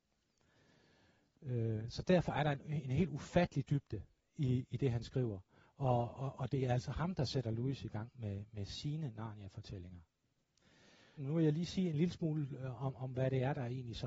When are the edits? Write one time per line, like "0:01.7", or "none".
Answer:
0:11.2